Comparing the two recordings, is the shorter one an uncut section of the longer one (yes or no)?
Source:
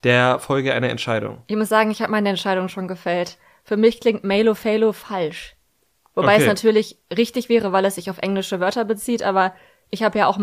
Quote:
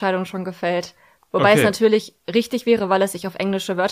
no